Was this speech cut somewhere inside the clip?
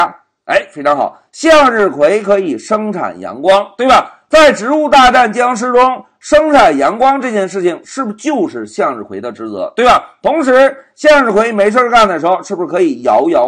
no; 0 cuts

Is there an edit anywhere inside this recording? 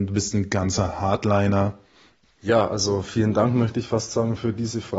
yes; 1 cut; at 2.2 s

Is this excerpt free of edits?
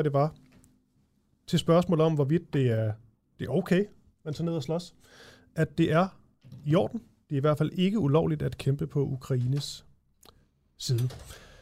yes; 0 cuts

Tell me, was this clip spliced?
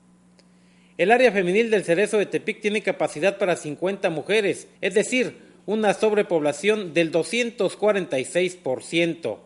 yes; 1 cut; at 4.8 s

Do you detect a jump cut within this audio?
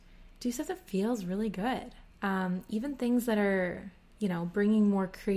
yes; 1 cut; at 2.1 s

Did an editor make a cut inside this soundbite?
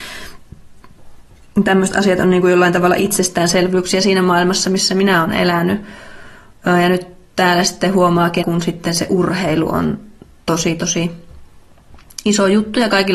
yes; 1 cut; at 8.4 s

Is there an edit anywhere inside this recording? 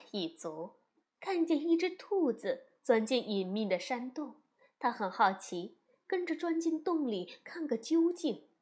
yes; 1 cut; at 1.2 s

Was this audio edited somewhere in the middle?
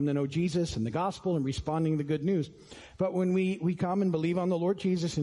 no; 0 cuts

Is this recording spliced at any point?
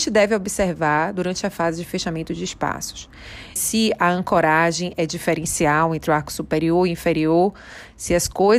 yes; 1 cut; at 3.6 s

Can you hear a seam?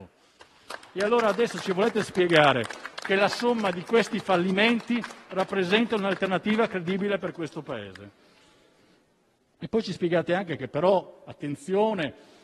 no; 0 cuts

